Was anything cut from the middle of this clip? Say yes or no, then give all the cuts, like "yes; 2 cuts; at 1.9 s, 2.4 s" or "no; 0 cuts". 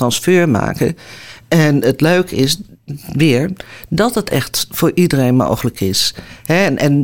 no; 0 cuts